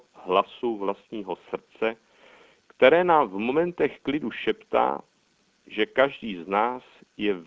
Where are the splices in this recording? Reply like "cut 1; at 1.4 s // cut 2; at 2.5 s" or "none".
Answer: none